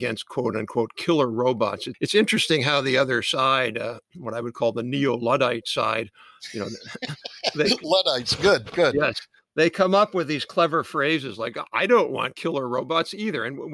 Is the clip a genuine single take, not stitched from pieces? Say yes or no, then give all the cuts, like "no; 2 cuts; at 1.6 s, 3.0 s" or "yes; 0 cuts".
yes; 0 cuts